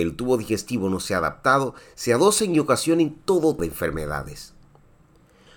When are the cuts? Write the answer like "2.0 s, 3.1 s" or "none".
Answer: 3.6 s